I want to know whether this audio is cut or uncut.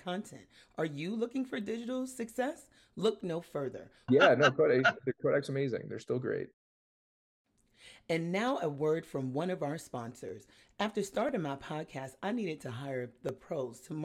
cut